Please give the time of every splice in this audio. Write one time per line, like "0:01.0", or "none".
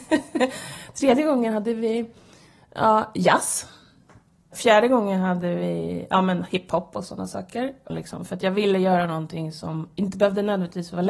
0:07.9